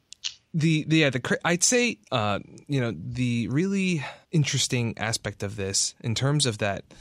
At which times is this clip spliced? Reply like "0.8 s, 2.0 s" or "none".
2.0 s, 4.2 s